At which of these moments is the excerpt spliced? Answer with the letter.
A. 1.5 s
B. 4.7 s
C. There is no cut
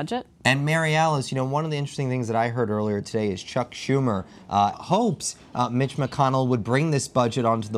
B